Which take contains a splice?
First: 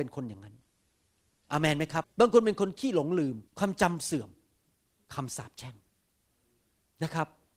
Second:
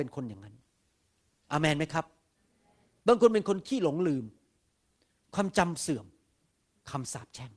first; 2 cuts; at 2.0 s, 3.5 s

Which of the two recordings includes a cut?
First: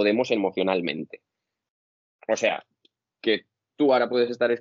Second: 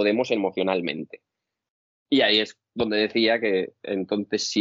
second; 1 cut; at 2.0 s

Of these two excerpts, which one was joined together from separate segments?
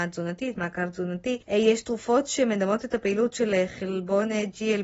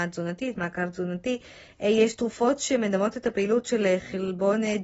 first; 1 cut; at 1.4 s

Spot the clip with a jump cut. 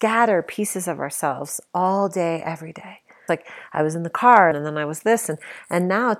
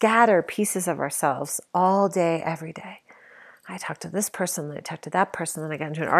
first; 2 cuts; at 3.3 s, 4.5 s

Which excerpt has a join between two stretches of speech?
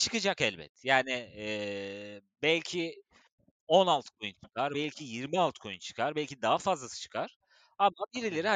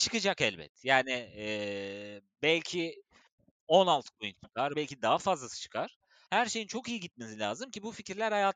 second; 2 cuts; at 4.7 s, 6.3 s

